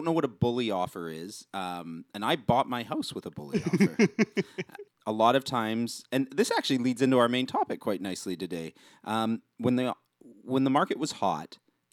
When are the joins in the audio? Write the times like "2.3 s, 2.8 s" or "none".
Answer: 4.9 s